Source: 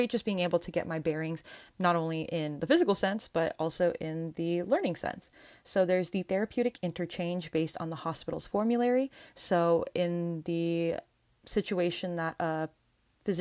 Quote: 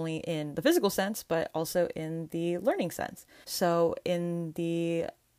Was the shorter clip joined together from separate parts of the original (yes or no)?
yes